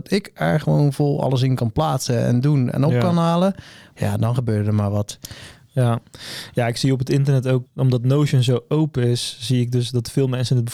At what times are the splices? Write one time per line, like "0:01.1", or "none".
0:03.9
0:07.6